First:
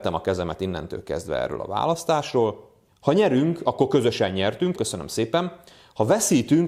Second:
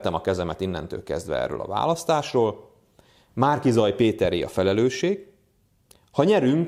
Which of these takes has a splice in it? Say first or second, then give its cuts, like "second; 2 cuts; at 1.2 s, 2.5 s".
first; 2 cuts; at 2.9 s, 4.8 s